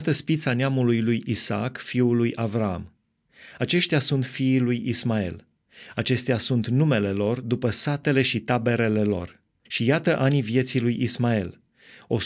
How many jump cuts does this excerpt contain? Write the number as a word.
two